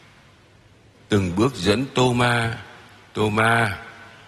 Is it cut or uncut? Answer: uncut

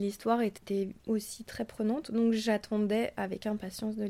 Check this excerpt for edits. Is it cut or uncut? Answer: uncut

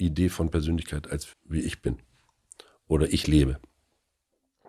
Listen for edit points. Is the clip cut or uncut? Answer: cut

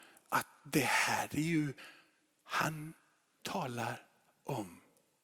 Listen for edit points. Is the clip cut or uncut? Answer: uncut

